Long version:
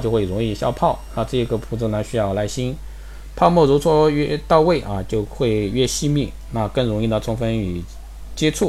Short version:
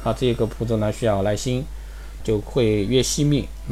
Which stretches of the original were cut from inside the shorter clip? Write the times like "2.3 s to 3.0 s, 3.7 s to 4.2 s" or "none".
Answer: 3.3 s to 5.0 s